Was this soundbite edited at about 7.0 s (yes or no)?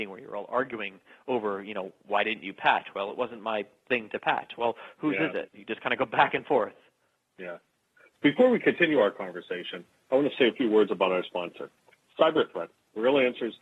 no